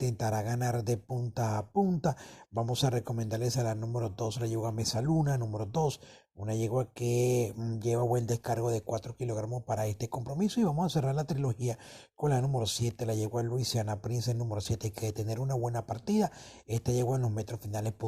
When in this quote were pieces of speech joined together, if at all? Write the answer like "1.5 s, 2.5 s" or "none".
none